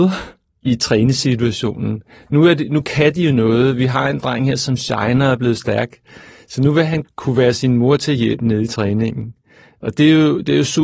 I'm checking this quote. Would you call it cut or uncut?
cut